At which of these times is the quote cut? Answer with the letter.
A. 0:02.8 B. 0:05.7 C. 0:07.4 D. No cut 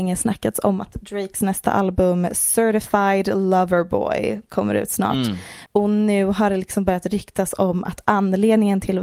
B